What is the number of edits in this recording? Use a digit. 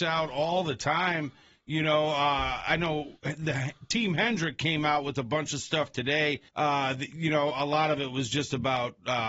1